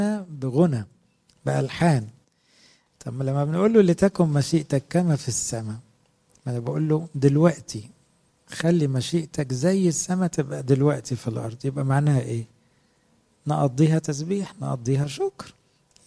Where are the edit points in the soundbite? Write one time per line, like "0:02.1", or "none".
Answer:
none